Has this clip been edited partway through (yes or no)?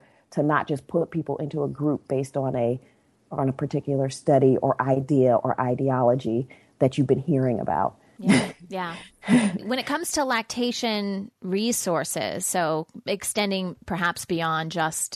yes